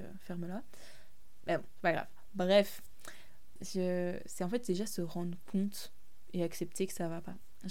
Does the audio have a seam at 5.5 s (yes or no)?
no